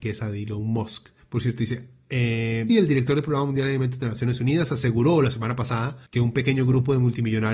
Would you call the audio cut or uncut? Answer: cut